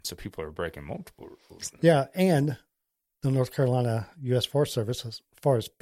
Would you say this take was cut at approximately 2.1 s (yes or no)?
no